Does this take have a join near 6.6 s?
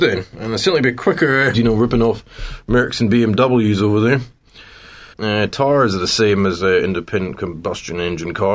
no; 2 cuts; at 1.5 s, 5.1 s

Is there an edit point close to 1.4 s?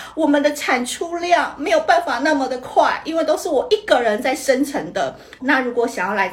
no; 1 cut; at 5.4 s

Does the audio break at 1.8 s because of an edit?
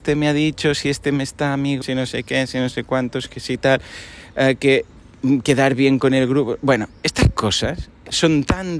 yes; 1 cut; at 1.8 s

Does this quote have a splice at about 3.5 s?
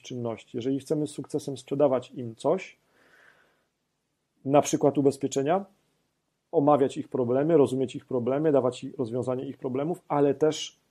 no; 1 cut; at 6.5 s

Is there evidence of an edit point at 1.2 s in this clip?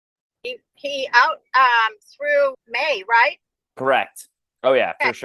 no; 1 cut; at 2.5 s

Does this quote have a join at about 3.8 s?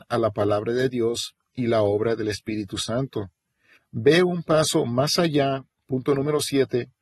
yes; 1 cut; at 3.8 s

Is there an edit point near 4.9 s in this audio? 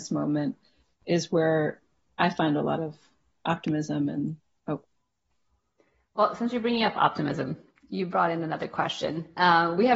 no; 0 cuts

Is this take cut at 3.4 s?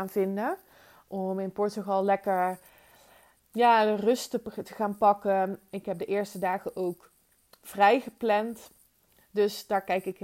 yes; 1 cut; at 3.4 s

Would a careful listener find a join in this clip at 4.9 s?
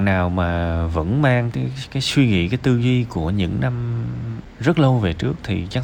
no; 1 cut; at 1.5 s

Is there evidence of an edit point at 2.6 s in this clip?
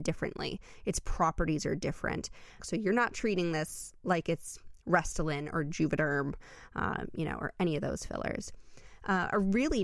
yes; 1 cut; at 2.6 s

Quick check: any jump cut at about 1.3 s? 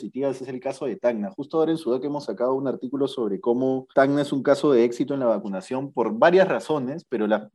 no; 1 cut; at 3.9 s

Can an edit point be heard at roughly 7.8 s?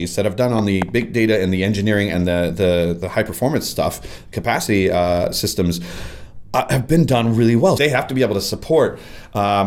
yes; 1 cut; at 7.8 s

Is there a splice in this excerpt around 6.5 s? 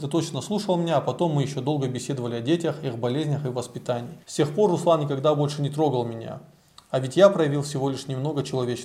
no; 1 cut; at 4.2 s

